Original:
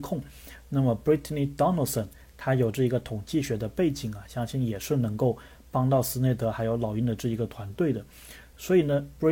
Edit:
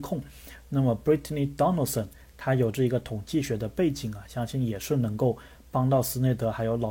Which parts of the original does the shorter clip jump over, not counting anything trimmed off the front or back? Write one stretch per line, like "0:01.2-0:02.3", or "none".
none

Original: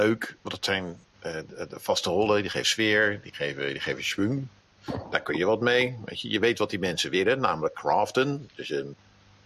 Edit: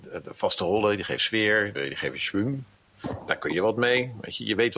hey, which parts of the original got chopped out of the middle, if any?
0:03.2-0:03.6

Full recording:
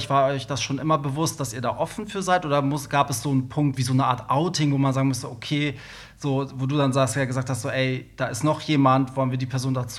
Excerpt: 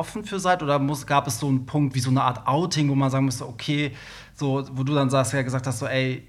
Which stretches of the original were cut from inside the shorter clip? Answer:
none

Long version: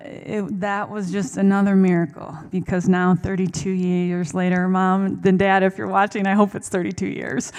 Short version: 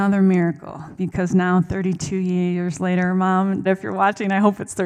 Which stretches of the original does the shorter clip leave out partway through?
0:05.2-0:05.6

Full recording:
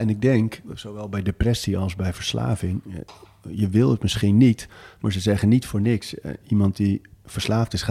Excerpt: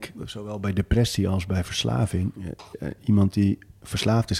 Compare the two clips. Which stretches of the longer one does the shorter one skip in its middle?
0:03.2-0:06.2

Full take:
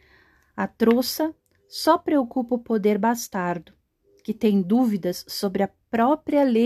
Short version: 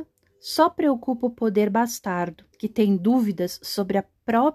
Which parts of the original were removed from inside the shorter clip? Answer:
0:03.8-0:04.2

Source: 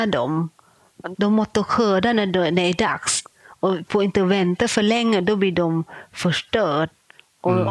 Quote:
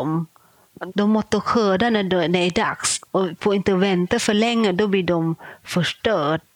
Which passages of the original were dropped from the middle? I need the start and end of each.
0:03.3-0:03.6

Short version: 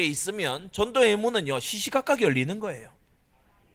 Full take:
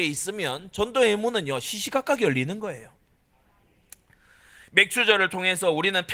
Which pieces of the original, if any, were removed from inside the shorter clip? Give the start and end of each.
none

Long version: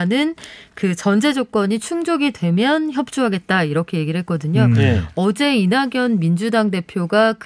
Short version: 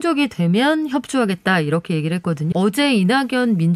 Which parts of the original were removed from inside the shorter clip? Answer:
0:04.5-0:05.1

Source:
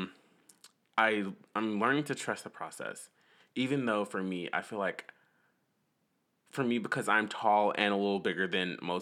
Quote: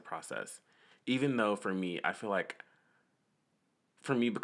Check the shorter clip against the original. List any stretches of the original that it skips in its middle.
none

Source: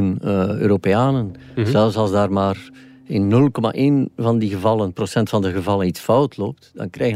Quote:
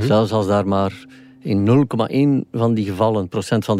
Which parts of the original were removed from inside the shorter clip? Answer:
none

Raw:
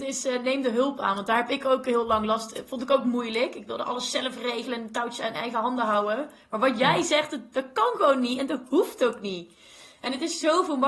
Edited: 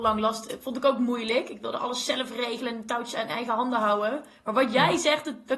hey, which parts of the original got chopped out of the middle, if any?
none

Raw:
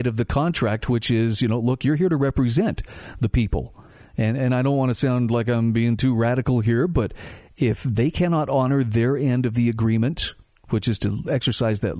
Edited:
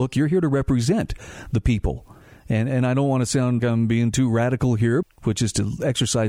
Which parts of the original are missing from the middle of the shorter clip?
0:05.3-0:05.4
0:06.9-0:10.5

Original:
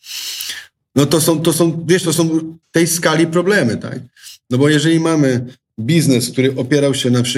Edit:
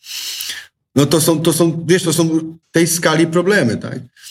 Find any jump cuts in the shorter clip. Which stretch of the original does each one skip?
none

